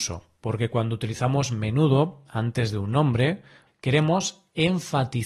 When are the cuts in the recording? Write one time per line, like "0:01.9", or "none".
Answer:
0:03.7